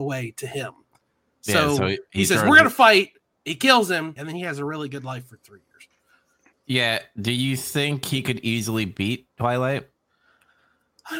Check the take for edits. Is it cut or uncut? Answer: cut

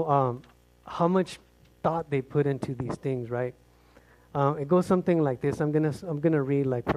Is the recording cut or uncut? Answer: uncut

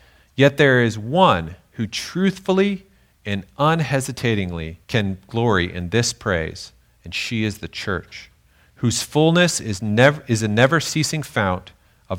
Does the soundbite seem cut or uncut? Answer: cut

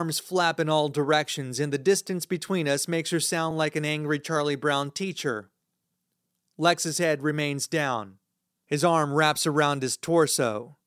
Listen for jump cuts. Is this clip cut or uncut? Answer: uncut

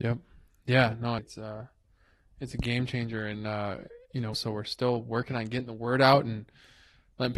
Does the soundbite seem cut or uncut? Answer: cut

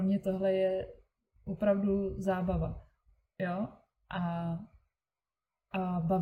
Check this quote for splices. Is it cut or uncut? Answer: cut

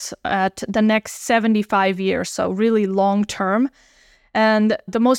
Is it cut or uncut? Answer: uncut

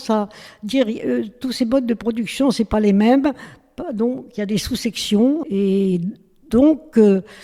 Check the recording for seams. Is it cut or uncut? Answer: cut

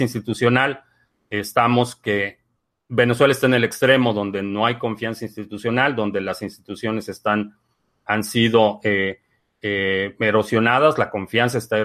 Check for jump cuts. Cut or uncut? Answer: uncut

